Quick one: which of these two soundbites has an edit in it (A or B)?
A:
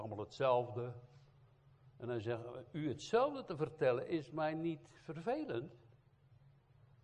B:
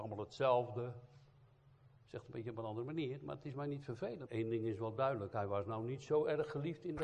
B